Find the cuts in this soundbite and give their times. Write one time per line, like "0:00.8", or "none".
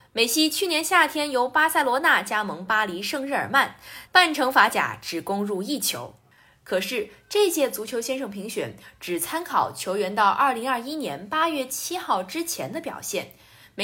0:04.1